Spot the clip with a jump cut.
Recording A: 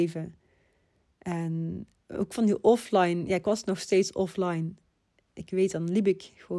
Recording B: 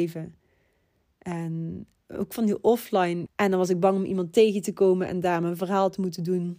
B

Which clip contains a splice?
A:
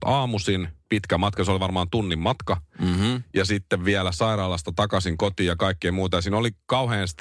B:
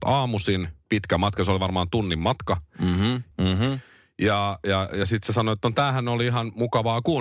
B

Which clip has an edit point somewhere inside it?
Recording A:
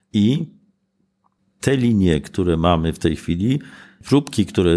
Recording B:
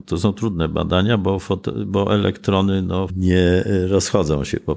B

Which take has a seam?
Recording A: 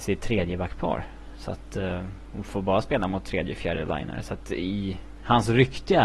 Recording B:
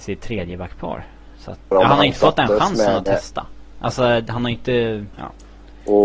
B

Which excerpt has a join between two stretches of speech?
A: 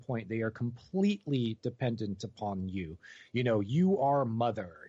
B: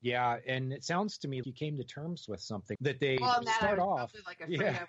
B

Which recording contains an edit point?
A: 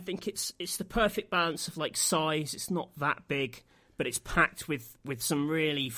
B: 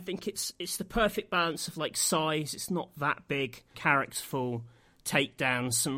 B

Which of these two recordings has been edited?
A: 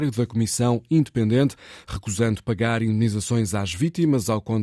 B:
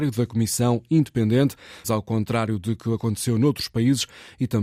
B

